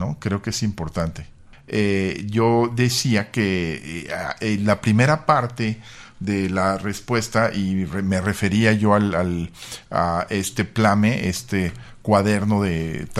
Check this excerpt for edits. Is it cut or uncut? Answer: uncut